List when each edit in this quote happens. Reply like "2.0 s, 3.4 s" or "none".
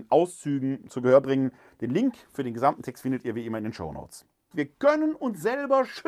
4.5 s